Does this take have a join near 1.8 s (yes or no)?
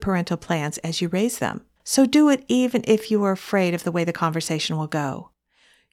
yes